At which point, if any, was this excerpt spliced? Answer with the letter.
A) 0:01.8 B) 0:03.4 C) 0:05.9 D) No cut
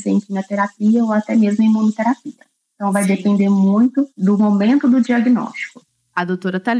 D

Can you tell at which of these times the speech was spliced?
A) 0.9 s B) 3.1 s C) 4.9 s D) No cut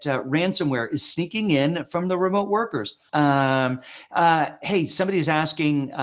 B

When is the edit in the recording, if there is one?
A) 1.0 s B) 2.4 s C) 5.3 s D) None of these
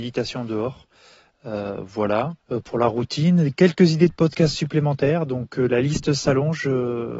B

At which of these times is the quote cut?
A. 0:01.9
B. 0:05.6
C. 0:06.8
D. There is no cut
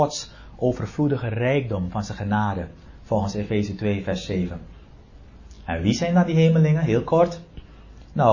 D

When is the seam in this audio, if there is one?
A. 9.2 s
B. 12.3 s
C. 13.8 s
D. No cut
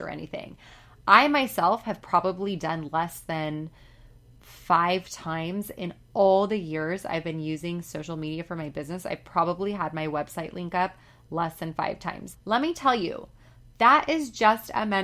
B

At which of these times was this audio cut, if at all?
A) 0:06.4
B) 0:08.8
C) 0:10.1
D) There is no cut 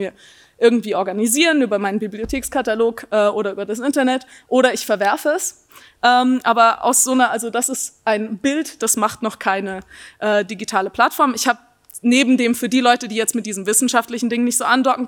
B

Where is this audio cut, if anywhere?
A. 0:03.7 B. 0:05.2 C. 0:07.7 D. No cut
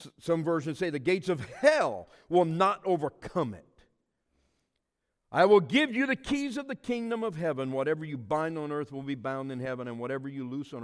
D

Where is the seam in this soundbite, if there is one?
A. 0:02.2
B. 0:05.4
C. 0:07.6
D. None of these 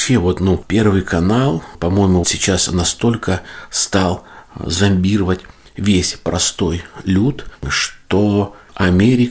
A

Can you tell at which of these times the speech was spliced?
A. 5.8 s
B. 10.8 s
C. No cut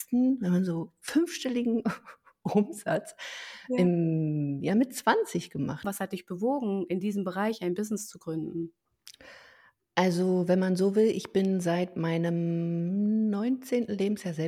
A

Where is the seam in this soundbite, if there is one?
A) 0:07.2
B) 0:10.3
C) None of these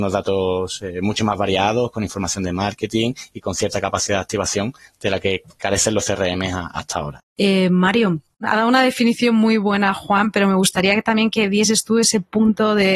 A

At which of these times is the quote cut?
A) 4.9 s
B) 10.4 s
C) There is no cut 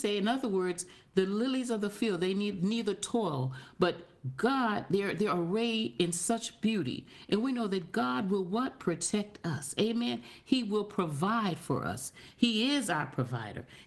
C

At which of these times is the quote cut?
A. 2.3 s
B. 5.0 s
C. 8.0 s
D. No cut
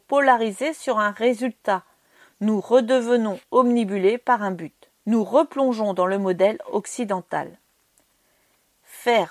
B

